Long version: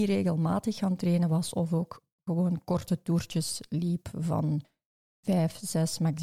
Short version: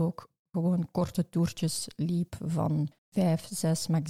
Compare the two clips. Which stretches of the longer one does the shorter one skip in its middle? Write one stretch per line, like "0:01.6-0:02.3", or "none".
0:04.7-0:05.1

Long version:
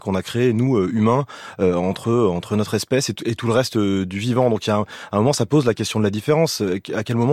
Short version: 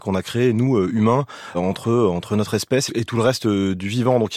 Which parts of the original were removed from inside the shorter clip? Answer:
0:01.5-0:01.7
0:03.1-0:03.2

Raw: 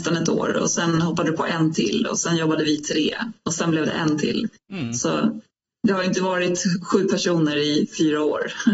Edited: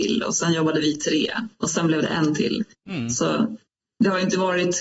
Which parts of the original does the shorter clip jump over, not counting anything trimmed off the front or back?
none

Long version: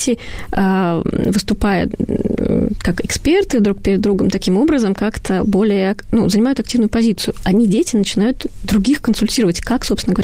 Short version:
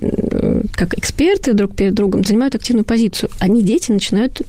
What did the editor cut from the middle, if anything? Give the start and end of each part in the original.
0:04.3-0:06.3

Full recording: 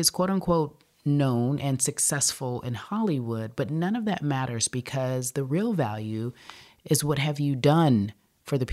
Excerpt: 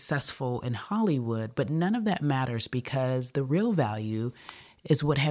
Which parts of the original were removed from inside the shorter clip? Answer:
none

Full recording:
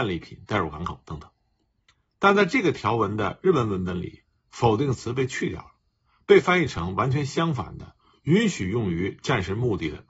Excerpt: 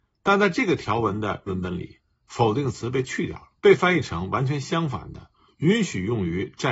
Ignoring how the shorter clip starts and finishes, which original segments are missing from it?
0:03.4-0:03.7
0:05.8-0:06.2

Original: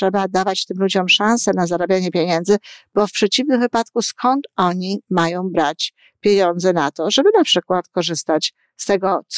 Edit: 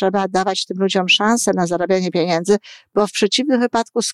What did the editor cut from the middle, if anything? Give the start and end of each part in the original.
none

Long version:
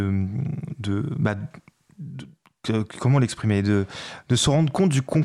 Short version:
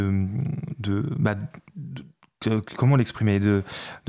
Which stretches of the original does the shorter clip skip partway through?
0:01.7-0:01.9

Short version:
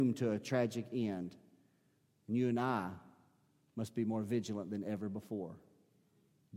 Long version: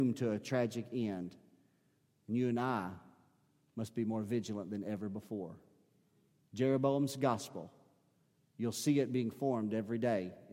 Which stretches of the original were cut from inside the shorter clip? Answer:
none

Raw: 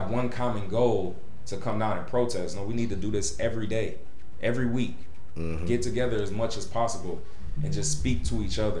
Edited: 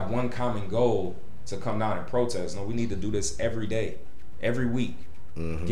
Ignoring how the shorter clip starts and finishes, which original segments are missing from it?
none

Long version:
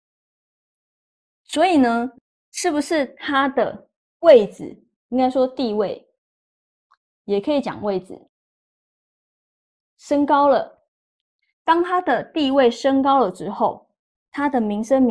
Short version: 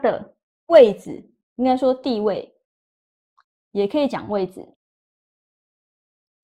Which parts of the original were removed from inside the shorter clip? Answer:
none

